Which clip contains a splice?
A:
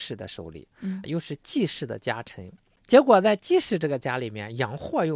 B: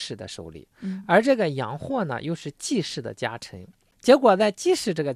A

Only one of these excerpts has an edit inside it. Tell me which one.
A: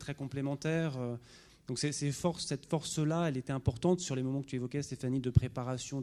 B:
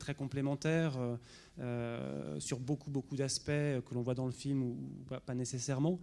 A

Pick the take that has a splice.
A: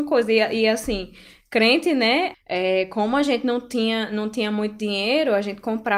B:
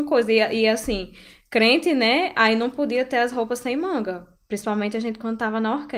A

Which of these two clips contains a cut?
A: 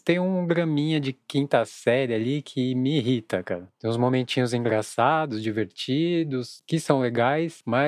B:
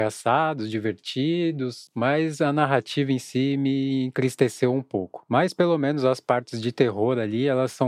B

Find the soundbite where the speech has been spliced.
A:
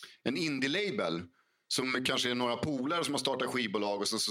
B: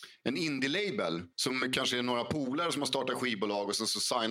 B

